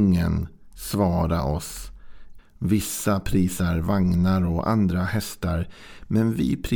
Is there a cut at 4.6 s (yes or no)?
no